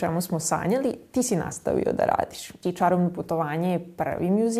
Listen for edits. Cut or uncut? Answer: cut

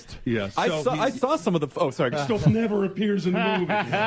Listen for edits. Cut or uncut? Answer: cut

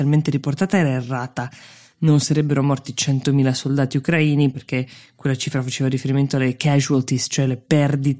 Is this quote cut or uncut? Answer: uncut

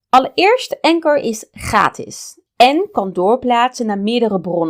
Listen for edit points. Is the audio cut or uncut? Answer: cut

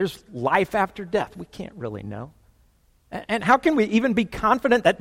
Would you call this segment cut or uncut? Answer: uncut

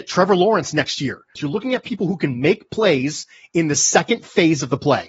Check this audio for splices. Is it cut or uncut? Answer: cut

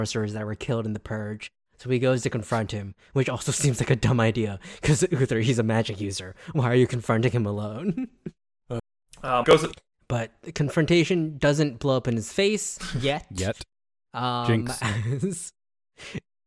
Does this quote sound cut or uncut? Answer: cut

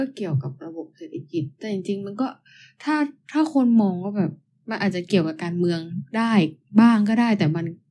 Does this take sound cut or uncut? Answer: uncut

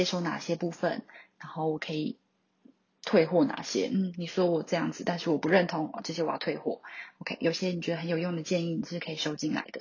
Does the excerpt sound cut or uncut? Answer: uncut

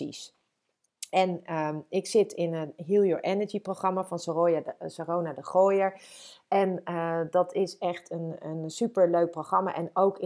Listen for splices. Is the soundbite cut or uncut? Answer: uncut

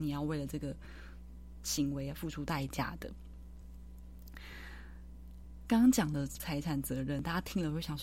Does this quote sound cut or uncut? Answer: cut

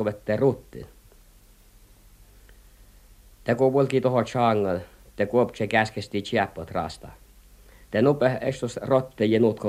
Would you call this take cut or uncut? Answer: cut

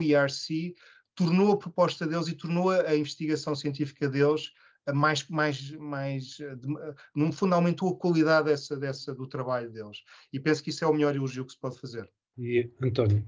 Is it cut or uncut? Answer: uncut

